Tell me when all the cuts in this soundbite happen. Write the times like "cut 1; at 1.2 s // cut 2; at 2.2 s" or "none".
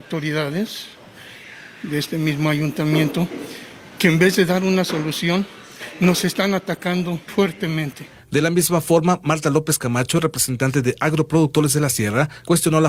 cut 1; at 7.3 s